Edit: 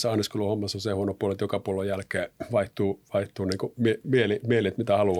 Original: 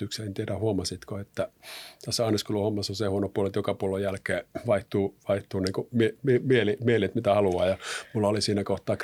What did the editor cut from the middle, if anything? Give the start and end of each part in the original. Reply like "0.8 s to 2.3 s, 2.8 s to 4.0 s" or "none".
6.2 s to 6.4 s